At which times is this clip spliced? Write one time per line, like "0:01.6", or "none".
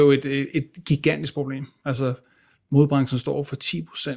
none

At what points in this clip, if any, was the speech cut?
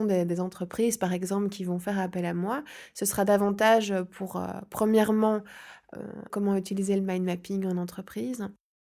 0:06.3

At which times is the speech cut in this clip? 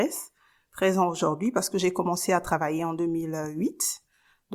none

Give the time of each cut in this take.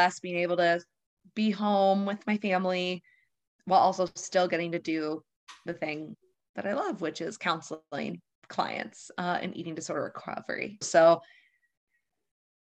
0:10.8

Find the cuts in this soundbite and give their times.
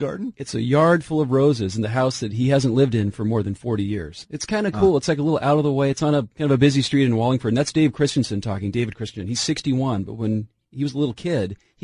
none

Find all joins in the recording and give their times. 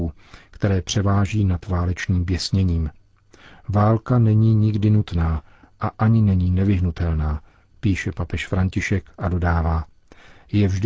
none

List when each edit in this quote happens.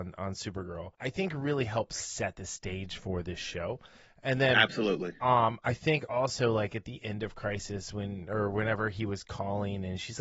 0:00.9

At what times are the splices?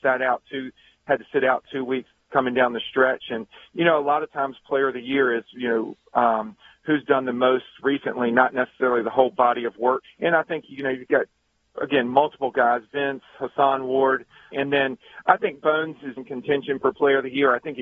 0:10.0
0:14.5
0:16.2

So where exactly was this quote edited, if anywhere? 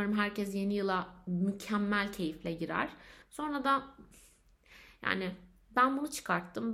0:03.2

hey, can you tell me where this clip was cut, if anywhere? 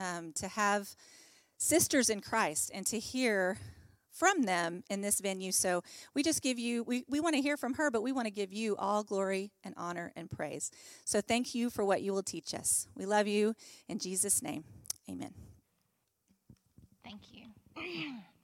none

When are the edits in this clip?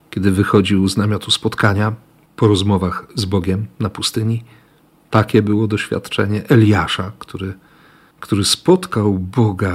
none

